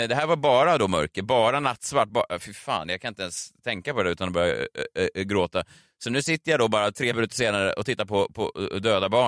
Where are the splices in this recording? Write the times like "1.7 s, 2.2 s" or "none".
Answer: none